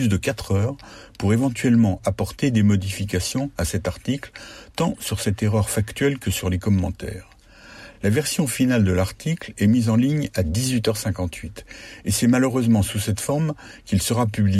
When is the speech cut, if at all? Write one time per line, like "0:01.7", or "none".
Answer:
none